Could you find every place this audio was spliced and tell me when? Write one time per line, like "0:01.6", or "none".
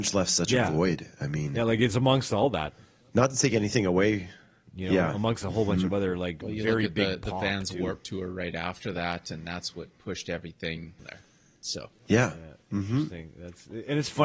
0:11.0